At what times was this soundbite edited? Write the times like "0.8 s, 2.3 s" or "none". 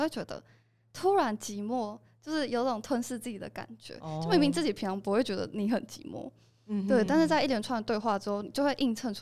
none